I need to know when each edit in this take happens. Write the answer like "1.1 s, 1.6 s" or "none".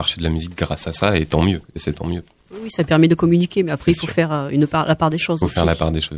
none